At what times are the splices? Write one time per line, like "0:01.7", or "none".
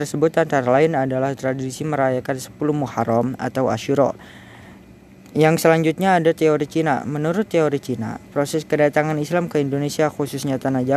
none